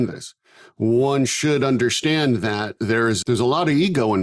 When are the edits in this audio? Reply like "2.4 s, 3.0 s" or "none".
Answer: 3.2 s